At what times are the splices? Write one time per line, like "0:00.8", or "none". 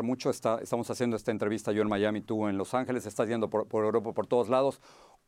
none